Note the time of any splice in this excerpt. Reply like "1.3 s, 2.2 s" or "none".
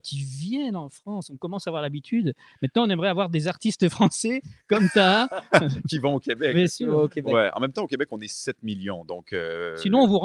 none